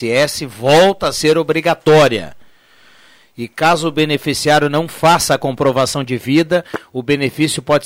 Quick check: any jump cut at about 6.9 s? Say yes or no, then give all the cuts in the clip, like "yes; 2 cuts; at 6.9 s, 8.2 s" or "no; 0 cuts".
no; 0 cuts